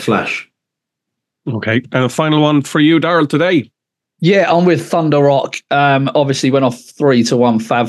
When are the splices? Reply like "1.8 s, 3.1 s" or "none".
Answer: none